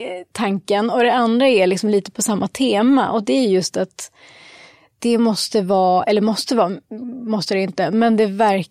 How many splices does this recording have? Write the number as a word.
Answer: zero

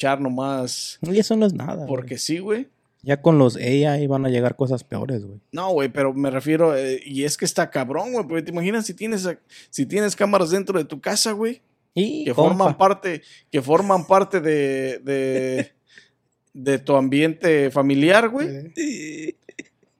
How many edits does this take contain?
one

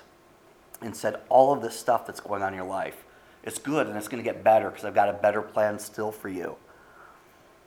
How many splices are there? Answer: zero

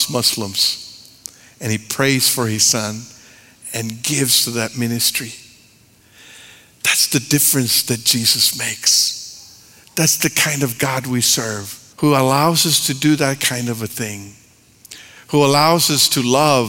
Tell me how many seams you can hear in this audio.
one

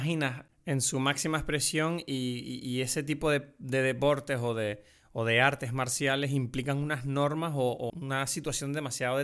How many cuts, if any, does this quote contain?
one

